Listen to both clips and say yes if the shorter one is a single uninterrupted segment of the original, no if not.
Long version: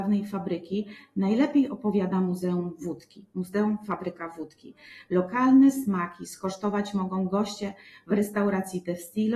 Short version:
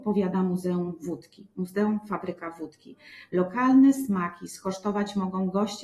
yes